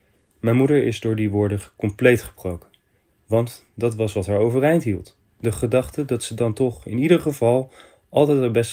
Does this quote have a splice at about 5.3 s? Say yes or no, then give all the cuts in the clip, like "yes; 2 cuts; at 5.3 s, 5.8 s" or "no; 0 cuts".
no; 0 cuts